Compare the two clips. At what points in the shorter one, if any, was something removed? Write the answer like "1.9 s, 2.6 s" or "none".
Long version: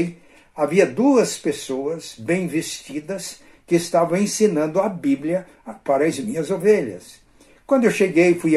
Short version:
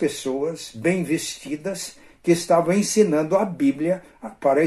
none